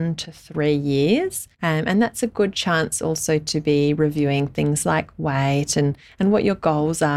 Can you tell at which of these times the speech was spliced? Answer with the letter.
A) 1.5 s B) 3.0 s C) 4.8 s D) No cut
A